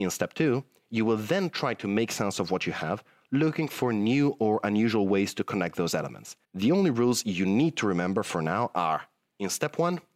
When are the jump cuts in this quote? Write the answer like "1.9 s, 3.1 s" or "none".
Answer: 6.4 s

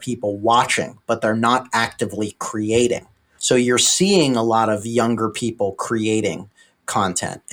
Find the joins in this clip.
3.4 s

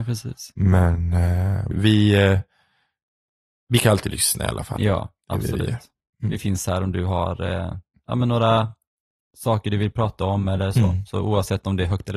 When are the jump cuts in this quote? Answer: 1.7 s

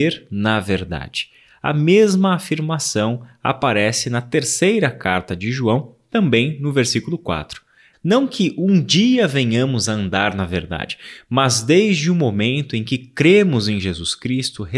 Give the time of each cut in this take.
7.9 s

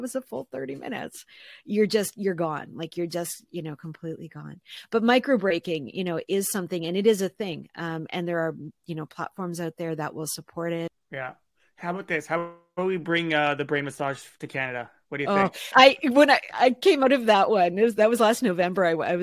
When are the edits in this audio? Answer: 15.7 s

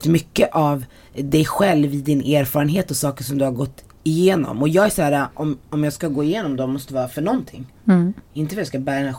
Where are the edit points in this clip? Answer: none

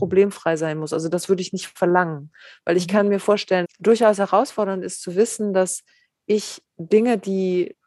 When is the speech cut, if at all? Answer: 3.6 s

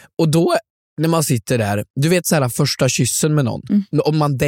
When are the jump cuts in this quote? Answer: none

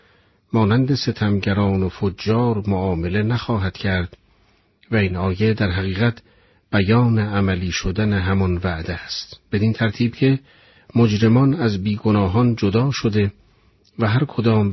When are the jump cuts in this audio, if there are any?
none

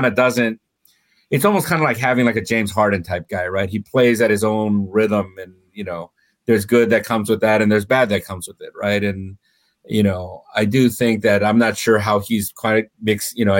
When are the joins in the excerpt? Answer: none

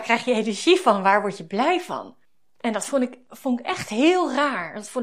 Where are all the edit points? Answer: none

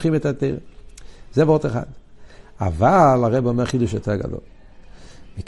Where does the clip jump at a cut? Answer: none

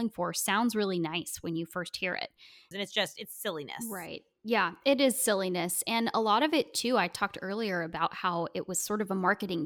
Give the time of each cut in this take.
2.7 s

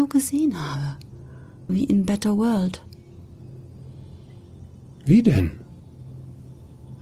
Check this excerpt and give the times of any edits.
1.7 s

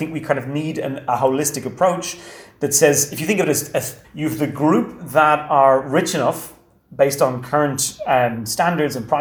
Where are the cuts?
4.0 s

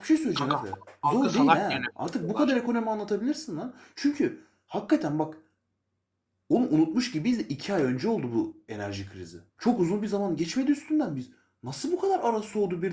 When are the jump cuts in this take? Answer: 9.5 s

